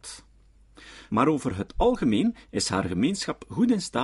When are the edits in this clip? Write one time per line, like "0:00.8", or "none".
0:01.1